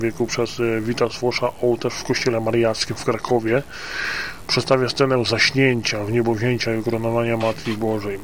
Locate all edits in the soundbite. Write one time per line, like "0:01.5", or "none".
none